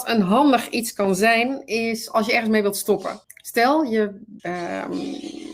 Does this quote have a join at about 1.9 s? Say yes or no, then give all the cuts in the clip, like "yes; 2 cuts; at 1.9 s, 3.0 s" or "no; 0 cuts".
no; 2 cuts; at 3.2 s, 4.4 s